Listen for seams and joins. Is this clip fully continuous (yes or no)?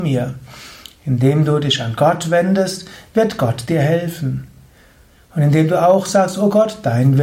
yes